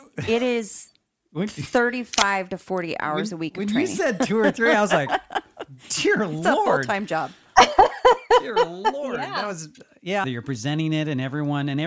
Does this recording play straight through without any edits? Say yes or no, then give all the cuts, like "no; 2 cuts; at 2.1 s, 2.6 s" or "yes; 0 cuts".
no; 1 cut; at 10.2 s